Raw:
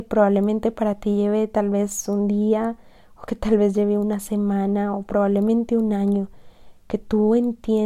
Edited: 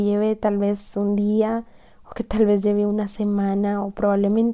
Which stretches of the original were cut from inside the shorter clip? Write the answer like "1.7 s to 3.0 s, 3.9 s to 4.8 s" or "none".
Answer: none

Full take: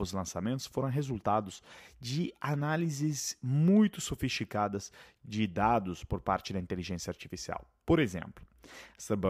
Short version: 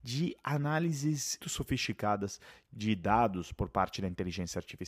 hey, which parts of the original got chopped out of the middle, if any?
3.4 s to 3.9 s

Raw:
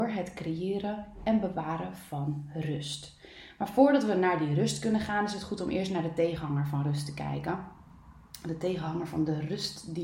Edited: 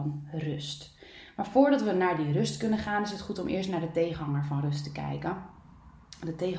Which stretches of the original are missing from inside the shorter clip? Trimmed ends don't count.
none

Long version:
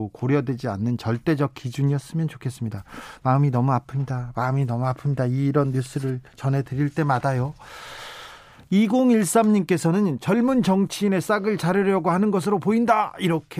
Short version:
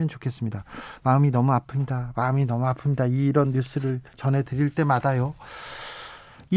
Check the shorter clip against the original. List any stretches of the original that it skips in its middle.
none

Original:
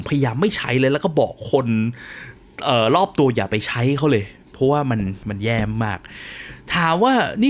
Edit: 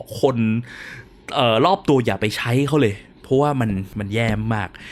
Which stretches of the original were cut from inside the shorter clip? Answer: none

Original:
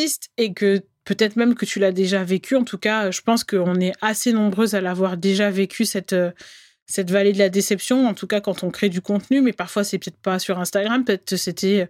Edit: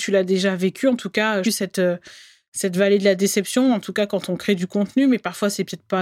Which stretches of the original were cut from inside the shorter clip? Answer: 3.1 s to 5.8 s

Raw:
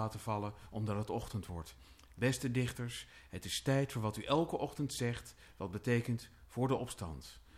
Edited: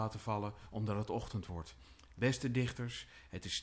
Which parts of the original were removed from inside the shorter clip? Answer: none

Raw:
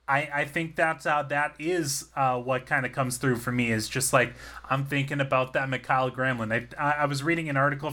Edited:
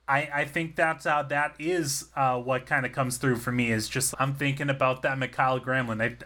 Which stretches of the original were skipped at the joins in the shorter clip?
4.1 s to 4.6 s

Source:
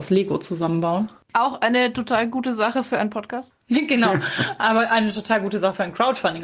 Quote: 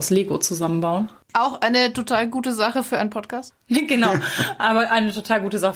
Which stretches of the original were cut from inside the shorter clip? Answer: none

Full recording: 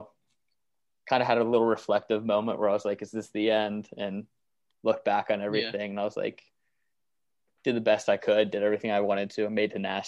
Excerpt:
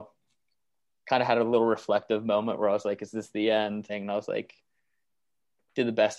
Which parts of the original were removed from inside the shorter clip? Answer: 3.9 s to 5.8 s

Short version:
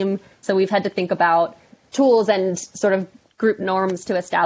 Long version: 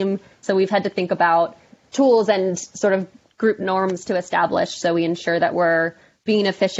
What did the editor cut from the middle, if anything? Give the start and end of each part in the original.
none

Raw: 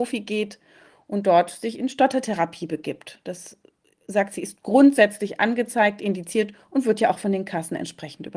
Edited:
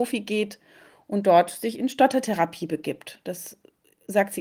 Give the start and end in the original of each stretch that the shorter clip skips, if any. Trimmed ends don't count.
none

